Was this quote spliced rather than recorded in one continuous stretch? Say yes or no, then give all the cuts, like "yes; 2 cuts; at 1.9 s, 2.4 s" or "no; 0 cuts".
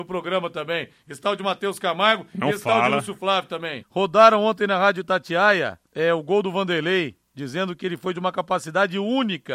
yes; 2 cuts; at 3.8 s, 5.9 s